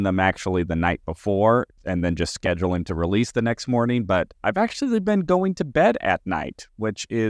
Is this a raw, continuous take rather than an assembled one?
no; 1 cut; at 1.8 s

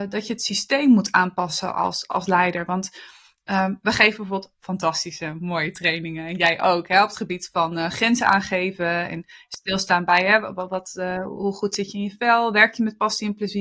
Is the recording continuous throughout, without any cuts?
yes; 0 cuts

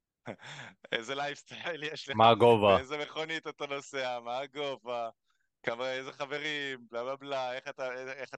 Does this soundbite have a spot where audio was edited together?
no; 0 cuts

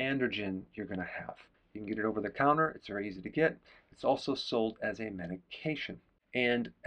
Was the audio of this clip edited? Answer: yes; 1 cut; at 1.5 s

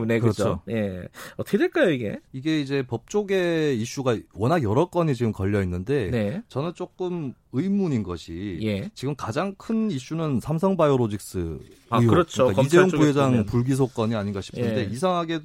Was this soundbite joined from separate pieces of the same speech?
yes; 2 cuts; at 2.2 s, 11.9 s

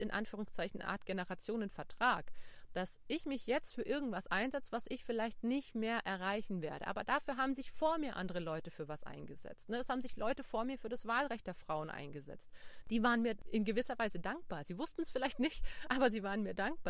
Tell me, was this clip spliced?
yes; 1 cut; at 12.8 s

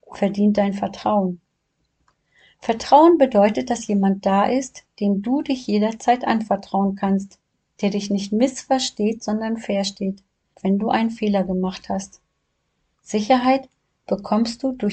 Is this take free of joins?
no; 2 cuts; at 10.5 s, 12.9 s

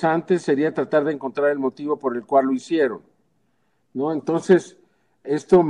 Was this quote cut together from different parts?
no; 0 cuts

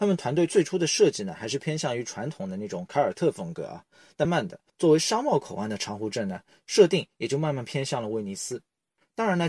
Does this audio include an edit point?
yes; 1 cut; at 4.3 s

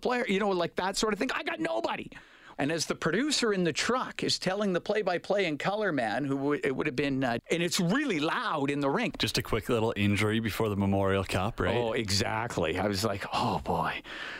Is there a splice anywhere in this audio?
yes; 3 cuts; at 2.5 s, 7.4 s, 9.1 s

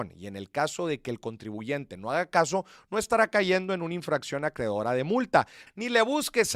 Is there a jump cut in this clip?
yes; 1 cut; at 5.7 s

